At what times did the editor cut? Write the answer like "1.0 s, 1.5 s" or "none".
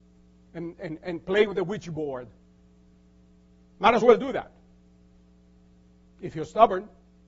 none